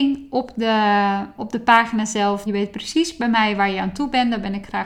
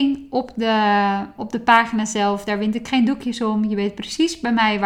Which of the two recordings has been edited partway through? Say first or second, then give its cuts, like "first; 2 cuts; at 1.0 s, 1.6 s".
first; 1 cut; at 2.5 s